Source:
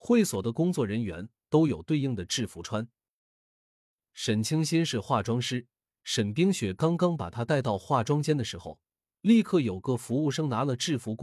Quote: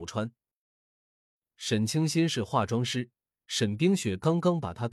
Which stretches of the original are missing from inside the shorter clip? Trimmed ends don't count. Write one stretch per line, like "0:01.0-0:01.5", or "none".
none